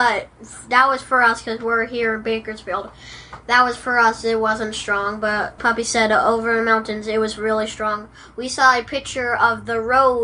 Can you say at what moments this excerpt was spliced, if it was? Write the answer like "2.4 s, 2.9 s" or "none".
5.6 s